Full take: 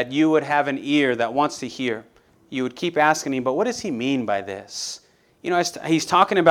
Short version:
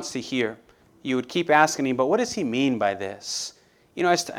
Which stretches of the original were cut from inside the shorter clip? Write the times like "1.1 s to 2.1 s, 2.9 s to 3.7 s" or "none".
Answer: none

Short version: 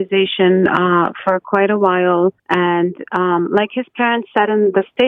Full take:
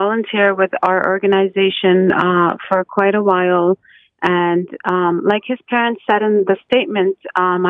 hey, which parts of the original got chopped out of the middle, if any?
3.8 s to 4.1 s

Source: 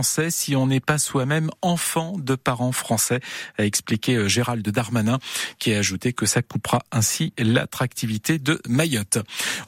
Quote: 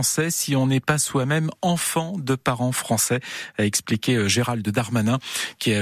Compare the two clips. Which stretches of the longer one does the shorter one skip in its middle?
none

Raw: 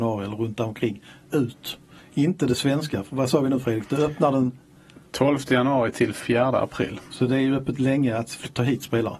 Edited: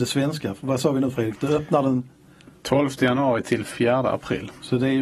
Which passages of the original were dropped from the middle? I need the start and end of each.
none

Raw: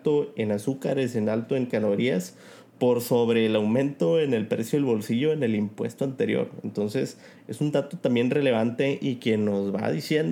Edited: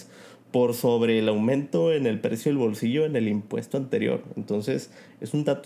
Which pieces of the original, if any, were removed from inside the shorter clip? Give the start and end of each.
none

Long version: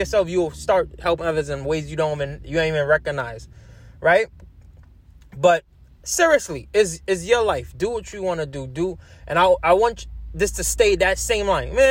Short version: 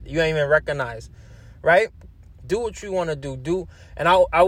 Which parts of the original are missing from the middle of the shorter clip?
4.8 s to 7.7 s

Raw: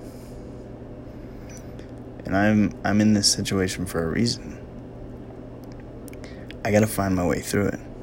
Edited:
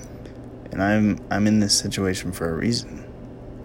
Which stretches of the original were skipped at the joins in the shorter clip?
none

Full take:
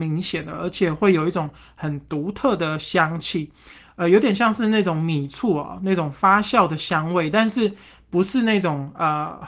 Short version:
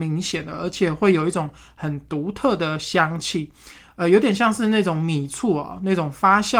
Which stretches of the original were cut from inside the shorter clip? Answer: none

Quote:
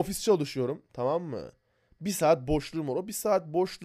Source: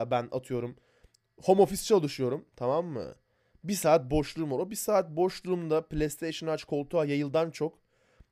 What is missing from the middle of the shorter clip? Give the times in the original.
none

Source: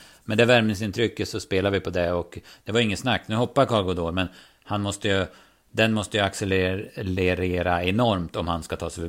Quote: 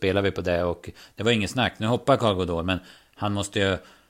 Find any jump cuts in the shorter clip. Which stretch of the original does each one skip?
none

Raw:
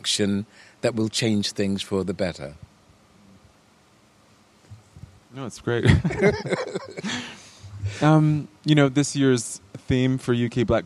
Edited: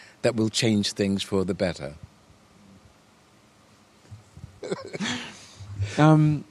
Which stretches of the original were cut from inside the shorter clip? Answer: 5.2 s to 6.7 s

